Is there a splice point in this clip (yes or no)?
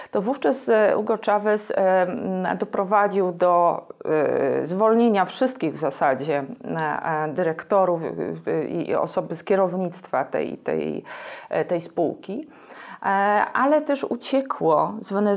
no